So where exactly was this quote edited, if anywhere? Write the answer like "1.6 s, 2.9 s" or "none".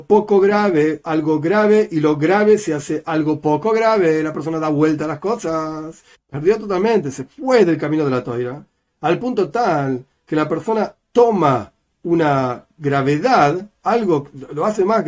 6.1 s